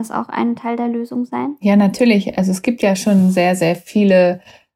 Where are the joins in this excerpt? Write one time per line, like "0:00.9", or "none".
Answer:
none